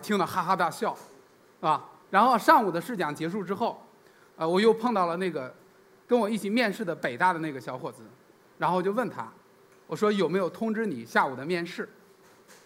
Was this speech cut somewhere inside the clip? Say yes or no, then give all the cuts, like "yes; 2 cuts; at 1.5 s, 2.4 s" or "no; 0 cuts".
yes; 1 cut; at 4.3 s